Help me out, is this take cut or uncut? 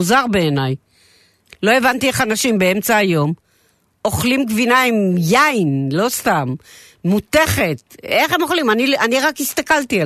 cut